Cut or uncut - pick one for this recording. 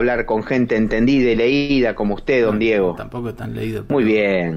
uncut